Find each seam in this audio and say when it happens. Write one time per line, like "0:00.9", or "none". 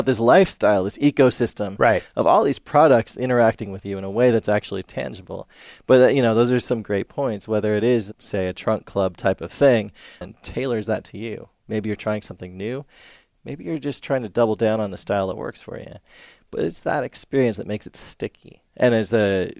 0:10.2